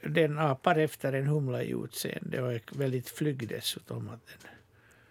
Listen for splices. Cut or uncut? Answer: uncut